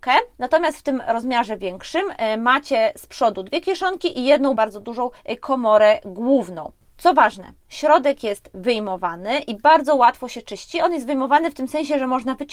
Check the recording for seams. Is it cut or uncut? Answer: cut